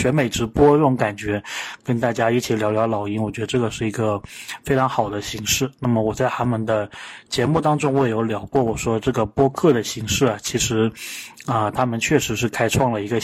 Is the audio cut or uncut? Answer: uncut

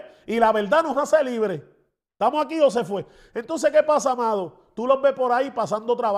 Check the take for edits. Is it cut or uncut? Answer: uncut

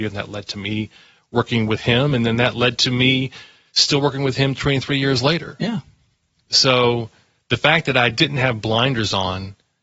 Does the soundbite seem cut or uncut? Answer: uncut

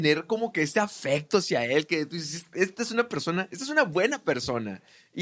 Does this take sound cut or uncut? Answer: uncut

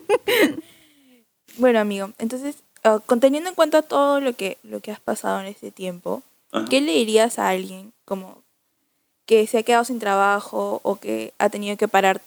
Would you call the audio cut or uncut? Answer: uncut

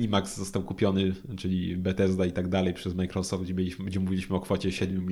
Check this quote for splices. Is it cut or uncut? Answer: uncut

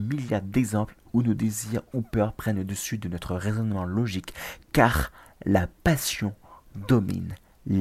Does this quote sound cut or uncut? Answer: uncut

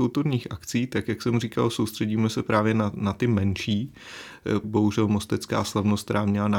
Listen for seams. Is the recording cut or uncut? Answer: cut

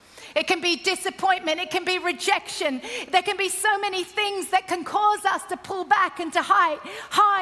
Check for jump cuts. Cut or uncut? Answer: uncut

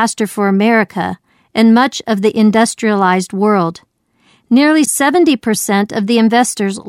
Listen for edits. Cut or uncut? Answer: uncut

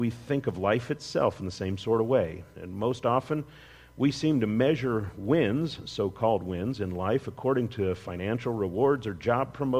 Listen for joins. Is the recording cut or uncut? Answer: cut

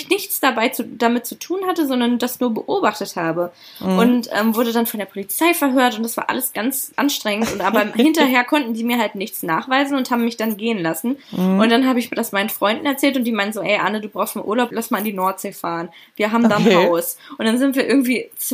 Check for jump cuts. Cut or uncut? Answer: uncut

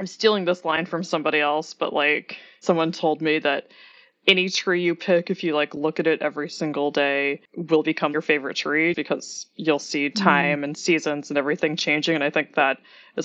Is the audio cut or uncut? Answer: cut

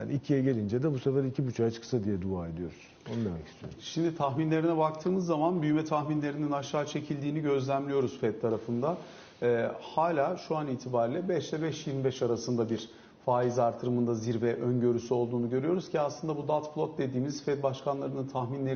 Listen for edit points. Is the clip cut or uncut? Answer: uncut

